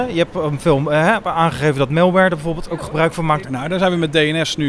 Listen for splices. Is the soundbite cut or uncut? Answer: cut